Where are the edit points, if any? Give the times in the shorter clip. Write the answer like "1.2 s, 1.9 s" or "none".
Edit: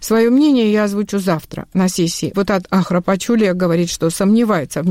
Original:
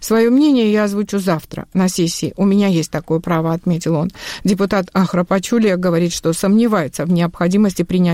2.3 s

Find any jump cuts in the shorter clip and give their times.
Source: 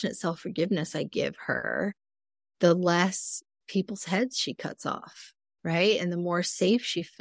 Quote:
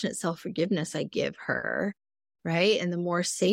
2.3 s

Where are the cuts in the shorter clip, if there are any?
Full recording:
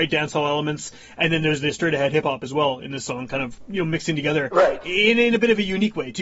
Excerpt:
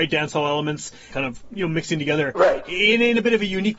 1.1 s

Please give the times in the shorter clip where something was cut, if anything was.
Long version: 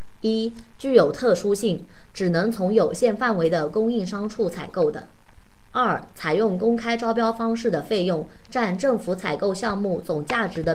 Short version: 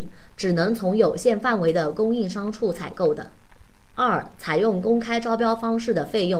none

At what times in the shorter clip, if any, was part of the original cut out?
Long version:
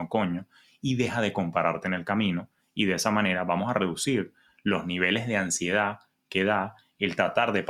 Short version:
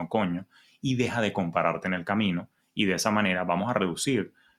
none

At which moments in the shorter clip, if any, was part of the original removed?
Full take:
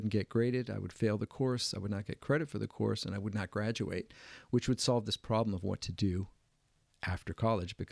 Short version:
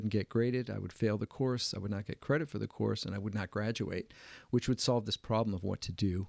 none

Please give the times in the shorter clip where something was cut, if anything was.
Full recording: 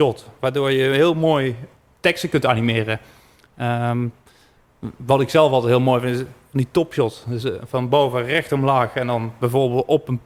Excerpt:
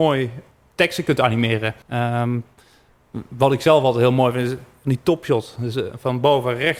1.8 s

